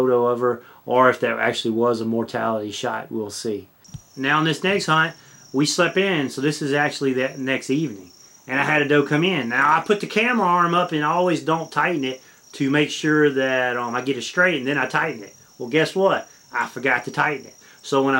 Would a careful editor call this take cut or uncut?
uncut